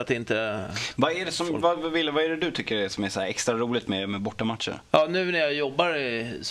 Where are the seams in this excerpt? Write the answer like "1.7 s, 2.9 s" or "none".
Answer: none